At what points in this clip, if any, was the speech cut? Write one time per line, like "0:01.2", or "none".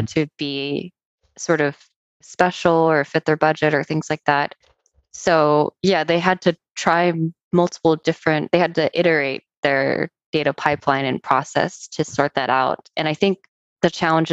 none